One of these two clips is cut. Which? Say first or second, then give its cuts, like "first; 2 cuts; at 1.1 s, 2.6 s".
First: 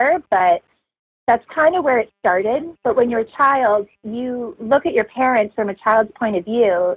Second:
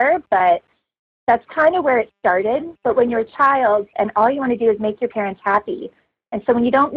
second; 1 cut; at 3.9 s